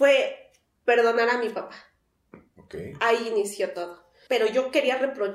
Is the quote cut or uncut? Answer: cut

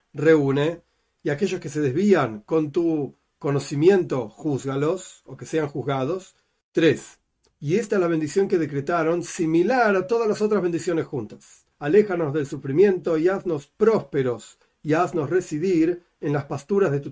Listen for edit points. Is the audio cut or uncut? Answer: cut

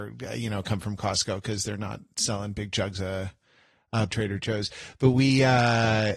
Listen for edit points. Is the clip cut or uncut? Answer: cut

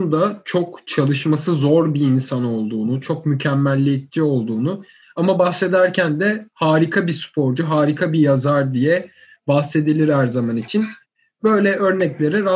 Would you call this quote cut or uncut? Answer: uncut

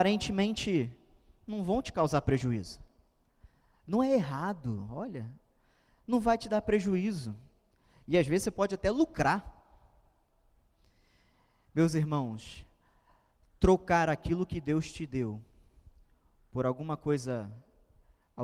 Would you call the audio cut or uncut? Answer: uncut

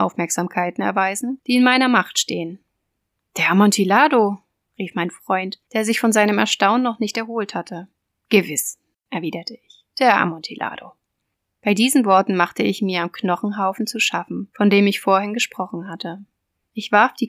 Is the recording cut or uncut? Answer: uncut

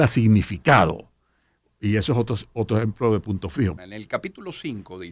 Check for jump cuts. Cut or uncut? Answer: cut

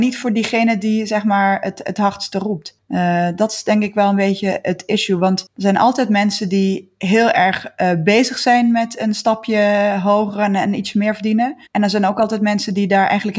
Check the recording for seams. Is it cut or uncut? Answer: cut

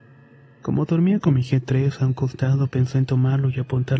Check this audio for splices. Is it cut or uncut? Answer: uncut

